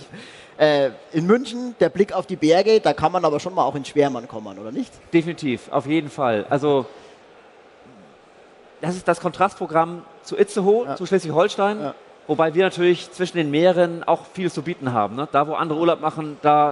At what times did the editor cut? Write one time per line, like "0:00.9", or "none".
none